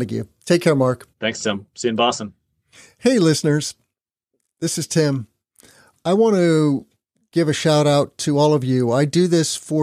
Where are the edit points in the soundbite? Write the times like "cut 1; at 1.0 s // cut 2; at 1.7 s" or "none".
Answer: cut 1; at 1.1 s